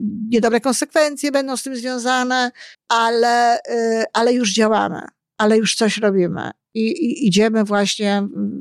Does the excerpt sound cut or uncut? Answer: cut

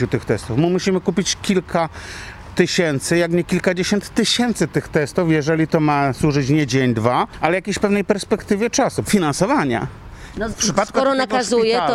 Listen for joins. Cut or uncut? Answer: cut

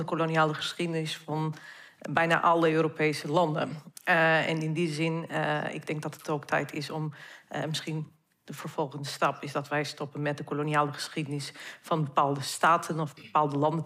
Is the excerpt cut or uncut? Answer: uncut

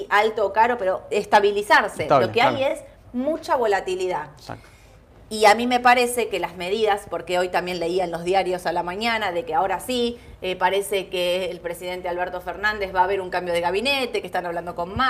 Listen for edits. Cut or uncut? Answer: uncut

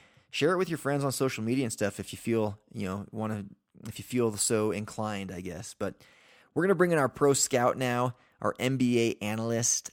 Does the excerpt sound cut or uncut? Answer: uncut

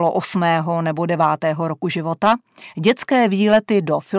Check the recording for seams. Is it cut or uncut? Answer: uncut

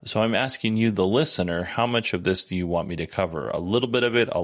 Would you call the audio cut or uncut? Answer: uncut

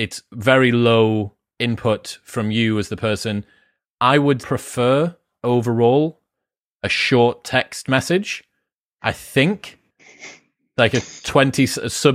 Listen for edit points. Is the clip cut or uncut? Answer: cut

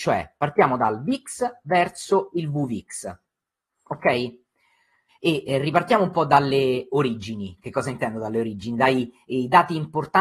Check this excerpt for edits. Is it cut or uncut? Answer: cut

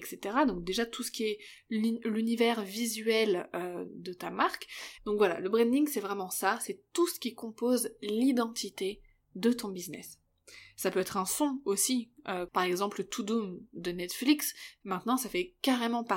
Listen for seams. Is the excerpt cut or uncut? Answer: cut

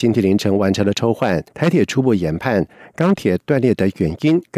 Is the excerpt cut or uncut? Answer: cut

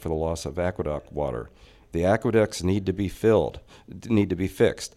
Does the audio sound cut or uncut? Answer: cut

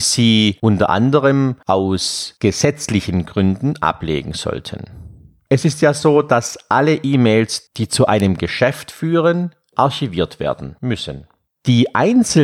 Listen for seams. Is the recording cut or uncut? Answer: cut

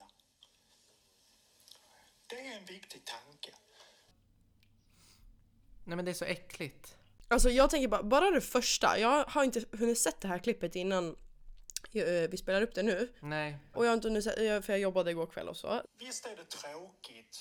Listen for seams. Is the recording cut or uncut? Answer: cut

